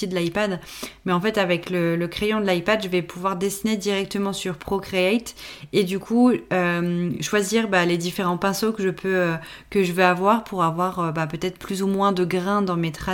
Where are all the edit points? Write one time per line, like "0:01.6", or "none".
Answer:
none

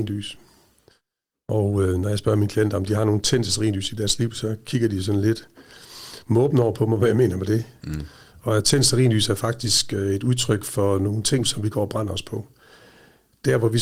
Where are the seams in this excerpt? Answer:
0:07.8
0:11.4

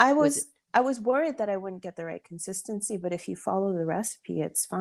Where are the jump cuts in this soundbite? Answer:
none

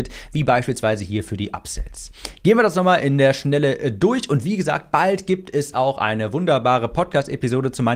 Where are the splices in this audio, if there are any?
none

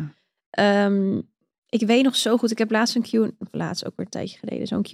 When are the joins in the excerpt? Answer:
none

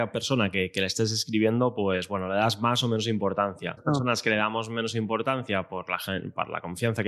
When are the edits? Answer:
0:03.8

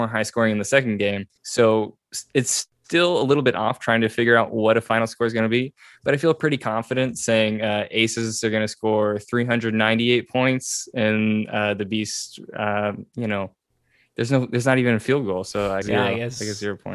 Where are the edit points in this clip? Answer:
0:01.4
0:15.8

